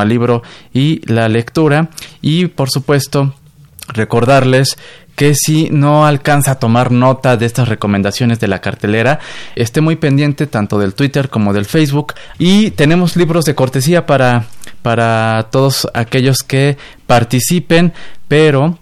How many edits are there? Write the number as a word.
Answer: two